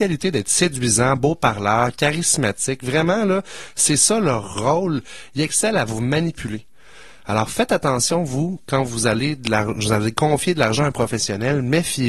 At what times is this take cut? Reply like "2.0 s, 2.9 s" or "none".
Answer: none

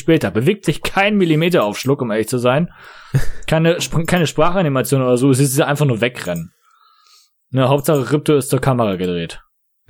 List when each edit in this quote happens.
none

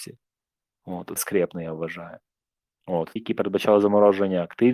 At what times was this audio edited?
1.2 s, 3.2 s

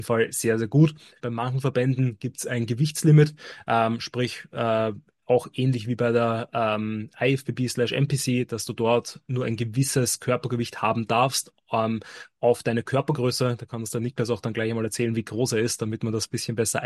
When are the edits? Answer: 1.2 s

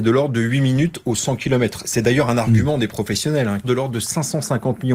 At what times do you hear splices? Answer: 3.6 s

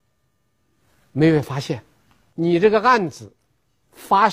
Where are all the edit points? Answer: 2.3 s

